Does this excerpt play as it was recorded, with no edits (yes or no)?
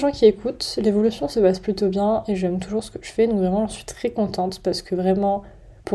yes